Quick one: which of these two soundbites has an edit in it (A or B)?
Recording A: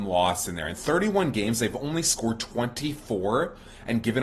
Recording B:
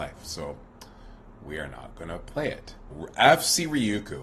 B